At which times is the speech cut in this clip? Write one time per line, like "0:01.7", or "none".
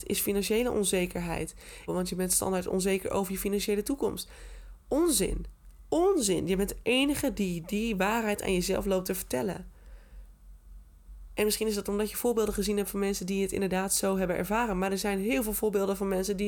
0:01.9